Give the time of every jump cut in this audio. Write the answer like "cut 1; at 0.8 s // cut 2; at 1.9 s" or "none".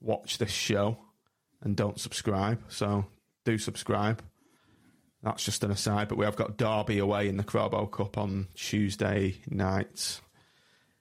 none